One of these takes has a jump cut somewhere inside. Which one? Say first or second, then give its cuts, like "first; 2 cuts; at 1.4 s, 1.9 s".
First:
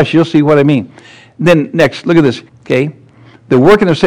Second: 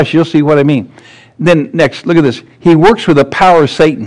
first; 1 cut; at 2.5 s